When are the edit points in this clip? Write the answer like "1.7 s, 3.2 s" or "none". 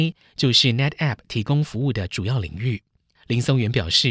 3.2 s